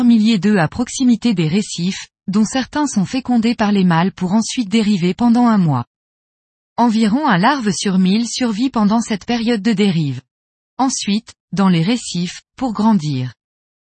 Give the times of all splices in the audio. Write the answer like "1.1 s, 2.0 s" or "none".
11.4 s